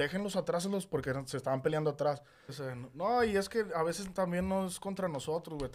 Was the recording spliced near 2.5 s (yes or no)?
yes